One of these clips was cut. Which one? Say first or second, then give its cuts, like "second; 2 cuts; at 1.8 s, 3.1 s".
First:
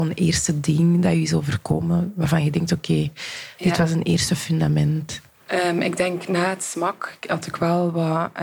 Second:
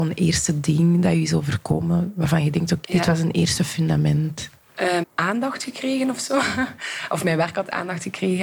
second; 2 cuts; at 2.8 s, 5.0 s